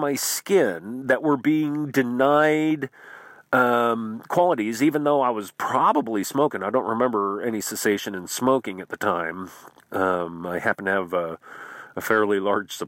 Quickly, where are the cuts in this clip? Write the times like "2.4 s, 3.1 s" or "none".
none